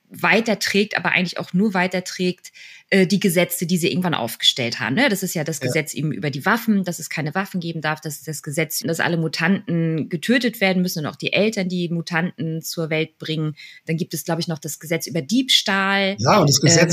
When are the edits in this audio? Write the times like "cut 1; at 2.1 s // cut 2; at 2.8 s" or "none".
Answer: none